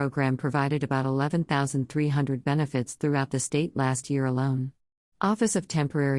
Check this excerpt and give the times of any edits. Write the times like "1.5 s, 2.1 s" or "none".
5.1 s